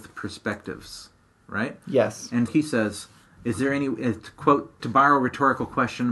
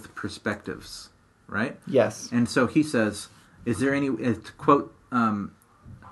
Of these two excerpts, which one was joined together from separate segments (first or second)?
first